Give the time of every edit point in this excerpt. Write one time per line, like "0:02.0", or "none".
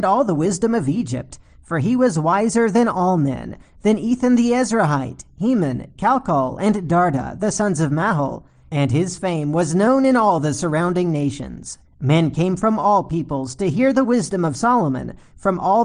0:11.8